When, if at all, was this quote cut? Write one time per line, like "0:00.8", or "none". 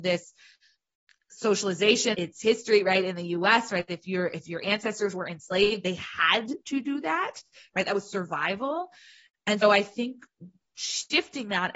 0:02.1
0:09.6